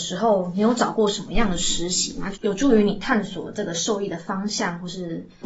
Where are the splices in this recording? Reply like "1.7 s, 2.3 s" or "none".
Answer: 2.3 s